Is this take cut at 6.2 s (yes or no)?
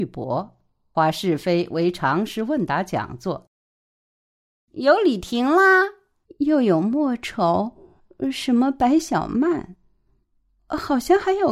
yes